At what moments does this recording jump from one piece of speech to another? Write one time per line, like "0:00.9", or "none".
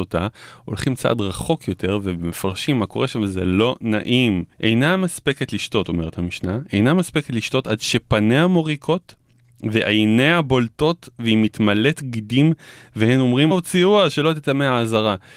0:04.5
0:13.5